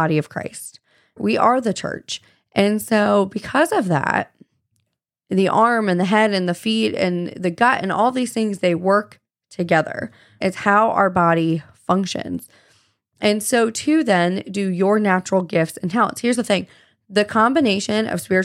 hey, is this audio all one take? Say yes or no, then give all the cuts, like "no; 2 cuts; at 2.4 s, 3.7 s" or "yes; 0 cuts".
yes; 0 cuts